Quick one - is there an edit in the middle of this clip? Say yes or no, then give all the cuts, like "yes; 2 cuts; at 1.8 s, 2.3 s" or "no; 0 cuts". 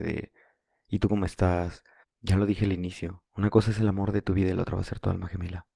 yes; 2 cuts; at 2.0 s, 3.3 s